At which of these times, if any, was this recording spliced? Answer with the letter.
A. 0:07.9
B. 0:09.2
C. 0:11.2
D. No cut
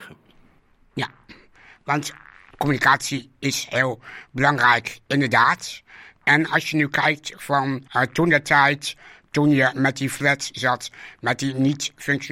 A